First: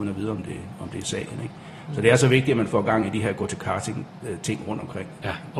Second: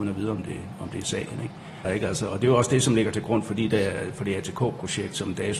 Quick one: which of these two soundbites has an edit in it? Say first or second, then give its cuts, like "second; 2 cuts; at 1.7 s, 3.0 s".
second; 1 cut; at 1.8 s